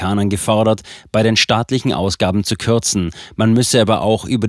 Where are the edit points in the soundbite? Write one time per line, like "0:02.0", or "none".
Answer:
none